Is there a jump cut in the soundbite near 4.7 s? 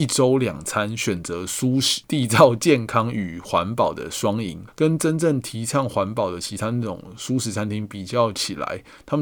yes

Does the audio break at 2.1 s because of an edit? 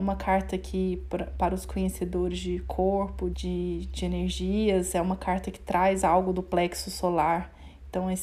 no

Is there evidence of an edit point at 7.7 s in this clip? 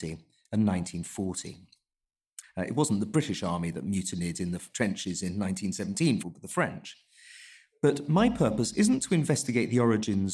no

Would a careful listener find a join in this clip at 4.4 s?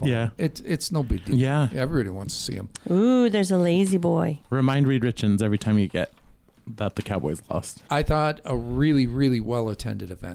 no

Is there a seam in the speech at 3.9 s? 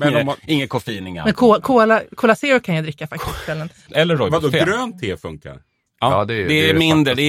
yes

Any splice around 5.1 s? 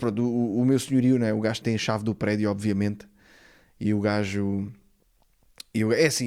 no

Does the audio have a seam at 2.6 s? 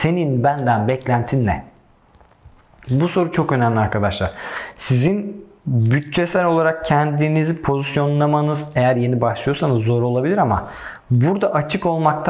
no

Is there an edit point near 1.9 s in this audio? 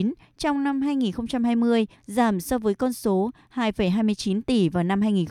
yes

